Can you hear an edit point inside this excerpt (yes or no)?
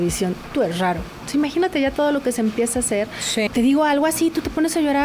yes